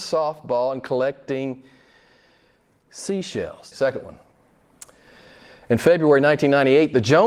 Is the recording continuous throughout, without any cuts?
no; 1 cut; at 3.7 s

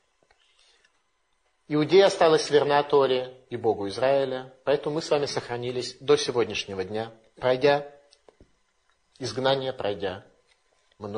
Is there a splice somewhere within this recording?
no; 0 cuts

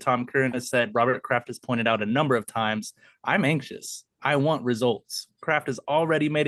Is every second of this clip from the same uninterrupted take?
yes; 0 cuts

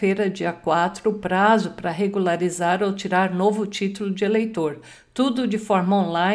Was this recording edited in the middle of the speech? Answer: no; 0 cuts

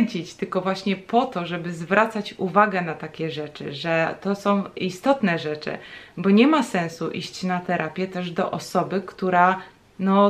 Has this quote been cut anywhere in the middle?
no; 0 cuts

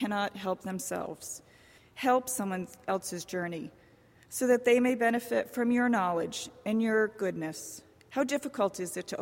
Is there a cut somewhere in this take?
yes; 1 cut; at 1.8 s

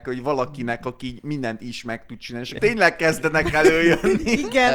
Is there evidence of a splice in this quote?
yes; 1 cut; at 2.6 s

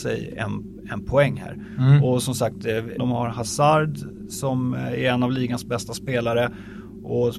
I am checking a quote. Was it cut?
yes; 1 cut; at 3.0 s

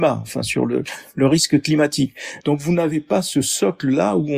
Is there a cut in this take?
no; 0 cuts

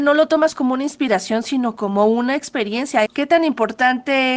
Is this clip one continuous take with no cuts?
no; 1 cut; at 3.1 s

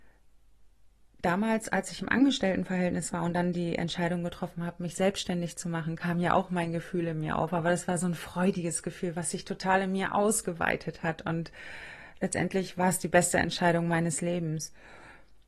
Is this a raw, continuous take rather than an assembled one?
yes; 0 cuts

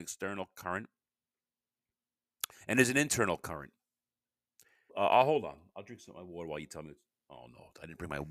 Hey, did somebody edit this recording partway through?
yes; 1 cut; at 4.9 s

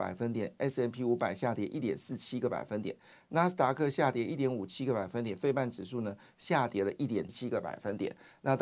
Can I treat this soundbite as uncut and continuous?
no; 1 cut; at 7.3 s

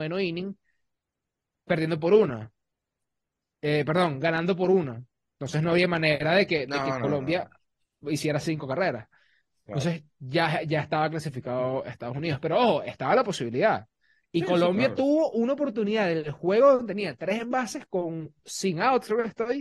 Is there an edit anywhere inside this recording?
no; 0 cuts

